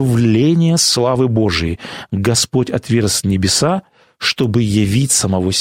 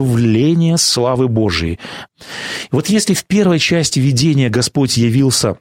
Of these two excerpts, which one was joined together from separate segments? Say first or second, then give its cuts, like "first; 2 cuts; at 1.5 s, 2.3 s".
second; 1 cut; at 2.1 s